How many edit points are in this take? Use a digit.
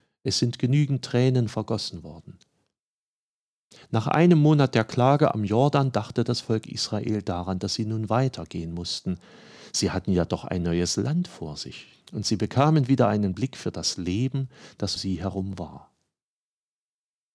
2